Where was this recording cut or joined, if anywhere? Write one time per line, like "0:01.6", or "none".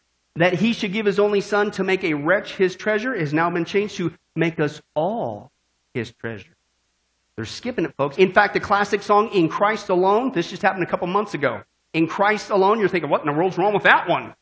0:08.1